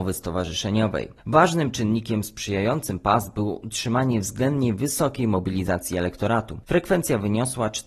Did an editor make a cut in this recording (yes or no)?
no